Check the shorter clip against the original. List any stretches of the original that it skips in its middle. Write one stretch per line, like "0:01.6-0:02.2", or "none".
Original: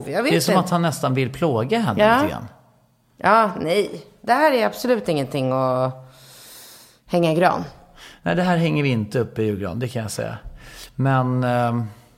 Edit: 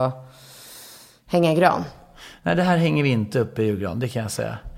none